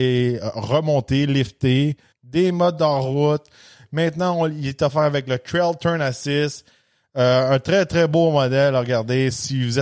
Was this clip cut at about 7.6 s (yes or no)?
no